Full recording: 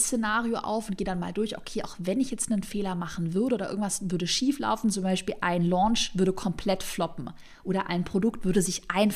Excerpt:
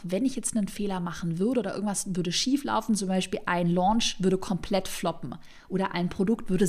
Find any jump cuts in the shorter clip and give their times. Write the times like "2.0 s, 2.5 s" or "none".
none